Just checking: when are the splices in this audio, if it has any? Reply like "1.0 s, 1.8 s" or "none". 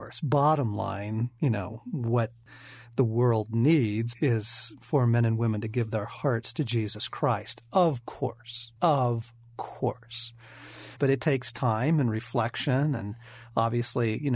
8.8 s, 11.0 s